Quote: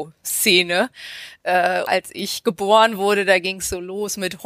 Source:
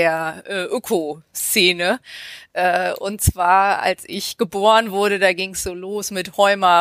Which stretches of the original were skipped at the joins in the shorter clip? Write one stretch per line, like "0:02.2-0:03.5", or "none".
0:03.0-0:03.8